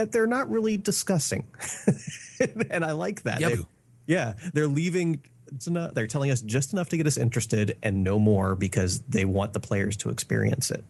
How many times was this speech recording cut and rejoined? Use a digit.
2